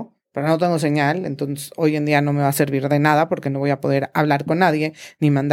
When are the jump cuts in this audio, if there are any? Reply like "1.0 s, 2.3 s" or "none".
none